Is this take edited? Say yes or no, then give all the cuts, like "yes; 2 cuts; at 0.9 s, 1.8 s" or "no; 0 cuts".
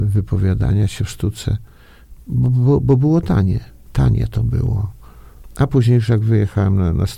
yes; 2 cuts; at 2.2 s, 3.9 s